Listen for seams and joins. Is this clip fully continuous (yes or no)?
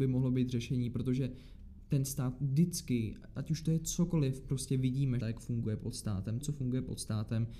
no